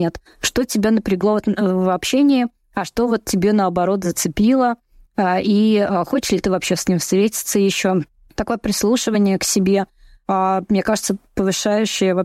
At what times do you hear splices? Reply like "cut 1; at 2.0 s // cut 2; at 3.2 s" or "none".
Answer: none